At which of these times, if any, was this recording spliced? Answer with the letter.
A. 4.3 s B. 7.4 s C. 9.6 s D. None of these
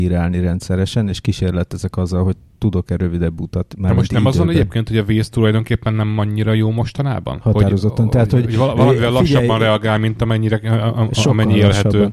B